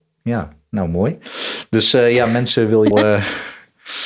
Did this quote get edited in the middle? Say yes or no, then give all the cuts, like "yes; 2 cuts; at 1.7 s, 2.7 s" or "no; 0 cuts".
yes; 1 cut; at 2.9 s